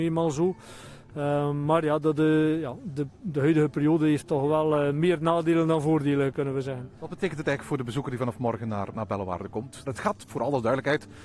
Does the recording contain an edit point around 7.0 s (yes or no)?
yes